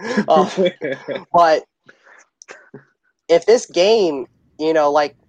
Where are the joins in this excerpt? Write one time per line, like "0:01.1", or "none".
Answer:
none